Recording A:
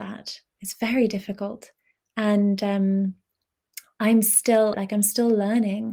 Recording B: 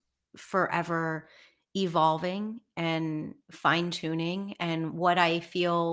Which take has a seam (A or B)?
A